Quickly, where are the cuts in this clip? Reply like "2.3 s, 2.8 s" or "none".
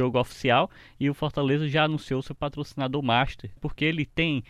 3.6 s

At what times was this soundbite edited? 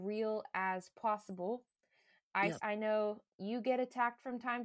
2.6 s

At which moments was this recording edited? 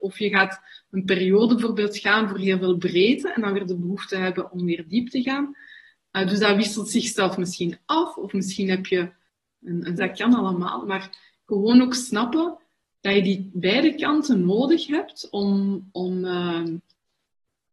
10.0 s

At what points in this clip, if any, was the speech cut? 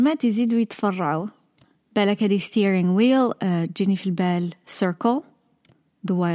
none

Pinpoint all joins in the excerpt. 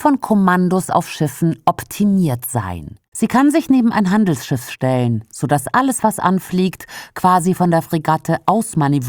3.1 s

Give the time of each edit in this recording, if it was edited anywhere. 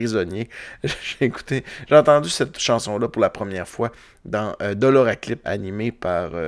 5.4 s

